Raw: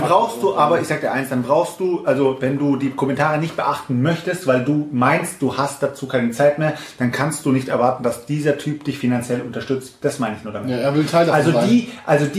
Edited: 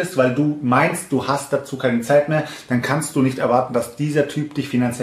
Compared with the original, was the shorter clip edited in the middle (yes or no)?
no